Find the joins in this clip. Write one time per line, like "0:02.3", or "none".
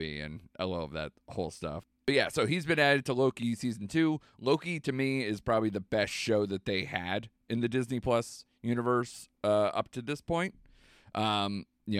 none